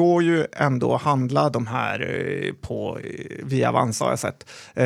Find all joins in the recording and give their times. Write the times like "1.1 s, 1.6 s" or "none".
none